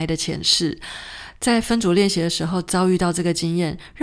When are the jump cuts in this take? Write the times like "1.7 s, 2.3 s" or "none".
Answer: 1.4 s